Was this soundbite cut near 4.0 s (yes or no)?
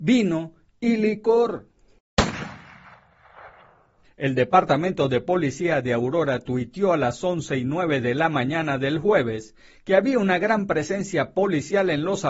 yes